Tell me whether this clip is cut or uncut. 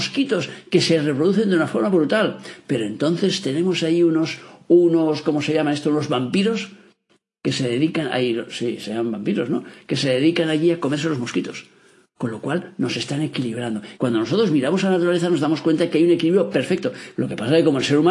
cut